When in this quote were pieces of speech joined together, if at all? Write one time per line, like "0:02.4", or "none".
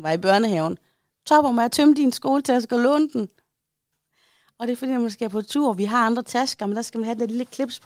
0:03.9